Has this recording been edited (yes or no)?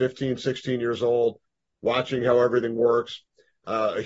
no